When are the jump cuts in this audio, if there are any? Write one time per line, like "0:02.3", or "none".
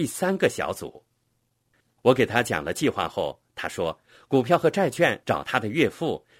0:02.0
0:05.2